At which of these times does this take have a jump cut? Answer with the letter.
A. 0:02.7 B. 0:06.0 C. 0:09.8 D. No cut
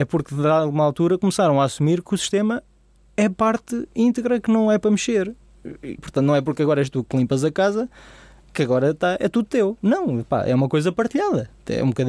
B